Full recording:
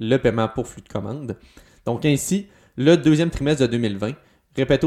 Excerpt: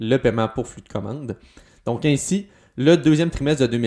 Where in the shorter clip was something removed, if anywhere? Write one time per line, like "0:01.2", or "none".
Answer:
none